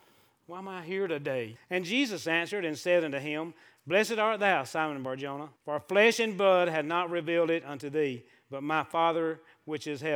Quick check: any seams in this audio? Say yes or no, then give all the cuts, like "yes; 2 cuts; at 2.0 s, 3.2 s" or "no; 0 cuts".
yes; 2 cuts; at 1.6 s, 5.6 s